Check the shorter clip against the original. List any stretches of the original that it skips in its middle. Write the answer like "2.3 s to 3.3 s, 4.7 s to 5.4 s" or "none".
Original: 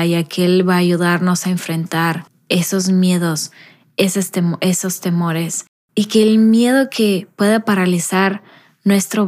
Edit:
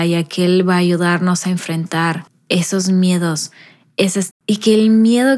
4.3 s to 5.8 s